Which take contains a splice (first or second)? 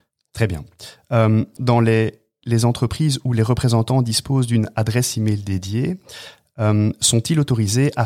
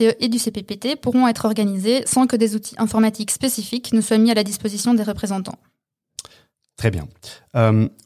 first